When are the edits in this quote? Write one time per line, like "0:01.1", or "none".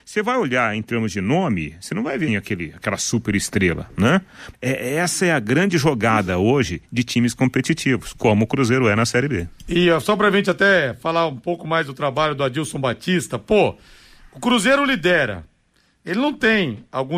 0:02.3
0:04.5